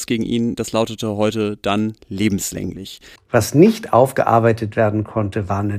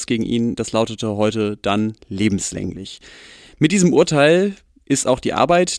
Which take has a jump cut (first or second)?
first